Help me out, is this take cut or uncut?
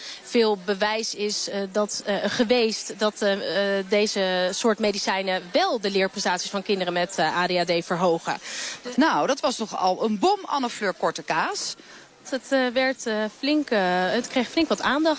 cut